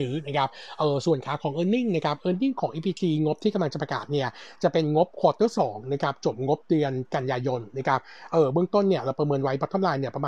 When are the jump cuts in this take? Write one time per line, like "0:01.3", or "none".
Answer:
none